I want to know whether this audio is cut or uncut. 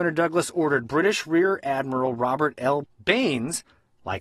cut